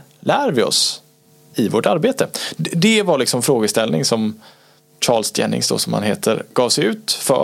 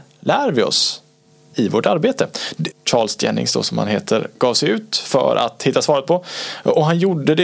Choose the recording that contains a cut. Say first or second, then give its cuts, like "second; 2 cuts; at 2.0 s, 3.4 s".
second; 1 cut; at 2.7 s